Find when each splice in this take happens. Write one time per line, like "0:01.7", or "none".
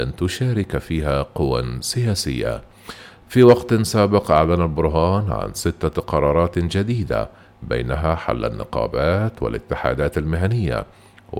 0:03.2